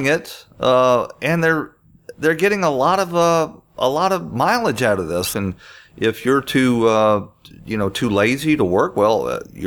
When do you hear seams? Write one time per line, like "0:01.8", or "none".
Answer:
0:05.3